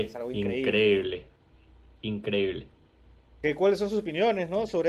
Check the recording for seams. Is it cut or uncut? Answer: uncut